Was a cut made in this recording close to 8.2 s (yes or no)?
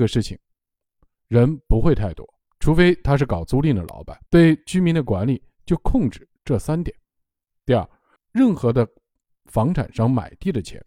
yes